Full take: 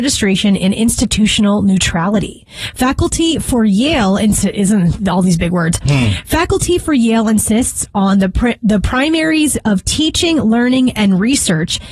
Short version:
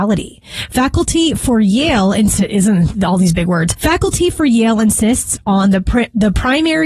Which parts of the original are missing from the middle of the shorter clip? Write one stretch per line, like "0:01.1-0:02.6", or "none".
0:05.8-0:06.2